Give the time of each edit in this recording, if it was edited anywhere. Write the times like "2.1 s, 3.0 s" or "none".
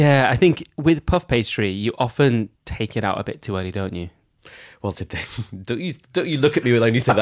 2.5 s, 4.9 s